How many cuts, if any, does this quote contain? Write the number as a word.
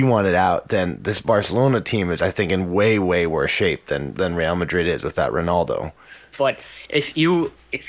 one